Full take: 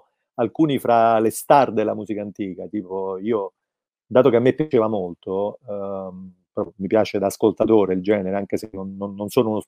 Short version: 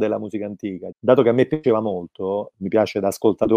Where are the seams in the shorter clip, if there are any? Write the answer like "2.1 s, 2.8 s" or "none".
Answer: 0.9 s, 2.5 s